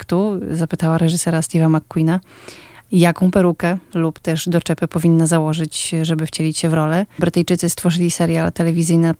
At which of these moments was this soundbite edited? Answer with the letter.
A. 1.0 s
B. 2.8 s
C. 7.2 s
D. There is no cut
C